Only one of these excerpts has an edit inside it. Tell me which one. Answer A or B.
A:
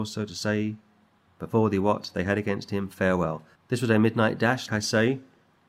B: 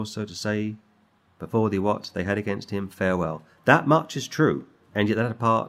A